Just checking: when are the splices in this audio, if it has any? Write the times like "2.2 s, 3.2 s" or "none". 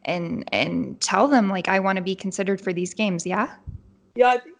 none